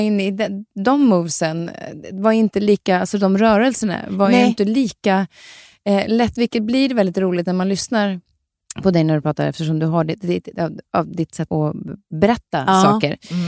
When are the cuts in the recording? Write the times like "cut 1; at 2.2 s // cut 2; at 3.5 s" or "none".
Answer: cut 1; at 11.5 s